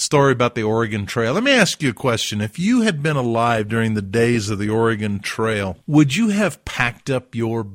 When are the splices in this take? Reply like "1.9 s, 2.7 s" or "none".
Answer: 5.8 s